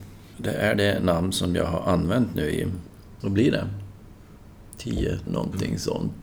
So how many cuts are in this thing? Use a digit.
1